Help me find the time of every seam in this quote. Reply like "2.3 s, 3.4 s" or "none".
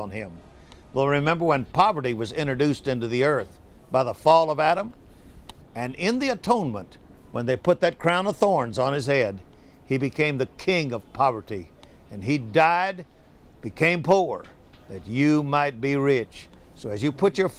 5.6 s